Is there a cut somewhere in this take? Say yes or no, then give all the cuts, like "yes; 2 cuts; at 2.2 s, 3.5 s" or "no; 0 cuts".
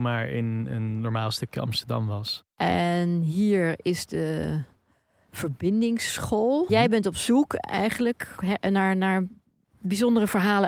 yes; 2 cuts; at 6.7 s, 8.4 s